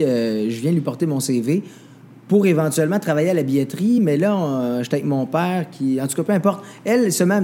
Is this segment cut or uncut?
uncut